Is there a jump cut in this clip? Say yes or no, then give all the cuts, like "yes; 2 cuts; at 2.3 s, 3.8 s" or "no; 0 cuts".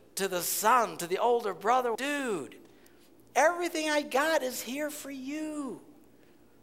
yes; 1 cut; at 1.9 s